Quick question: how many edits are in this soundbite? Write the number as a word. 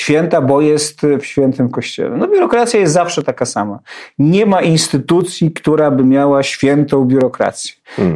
zero